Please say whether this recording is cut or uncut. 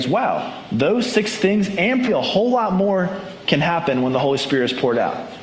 cut